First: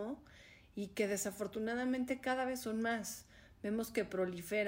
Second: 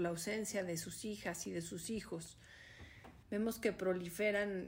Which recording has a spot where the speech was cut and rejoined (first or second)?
second